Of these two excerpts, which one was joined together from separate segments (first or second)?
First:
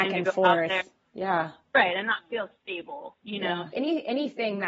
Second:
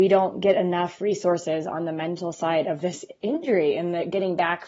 first